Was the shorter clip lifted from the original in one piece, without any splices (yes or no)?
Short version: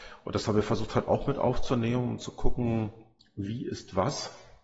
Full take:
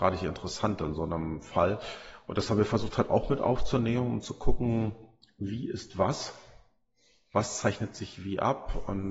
yes